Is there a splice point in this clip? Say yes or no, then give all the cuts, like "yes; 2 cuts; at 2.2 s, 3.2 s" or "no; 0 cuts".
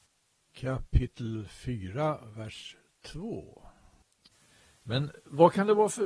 no; 0 cuts